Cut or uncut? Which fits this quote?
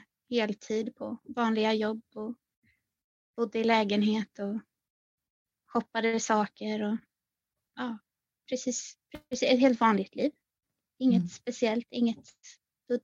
uncut